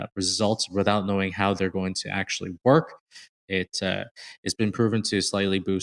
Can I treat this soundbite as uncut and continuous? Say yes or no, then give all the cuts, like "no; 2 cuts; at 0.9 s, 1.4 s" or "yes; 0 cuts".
no; 1 cut; at 3.5 s